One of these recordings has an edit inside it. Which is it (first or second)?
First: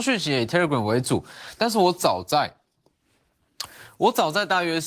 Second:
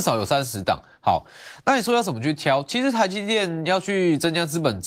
first